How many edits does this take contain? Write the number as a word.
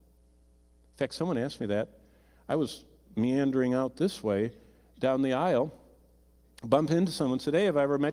zero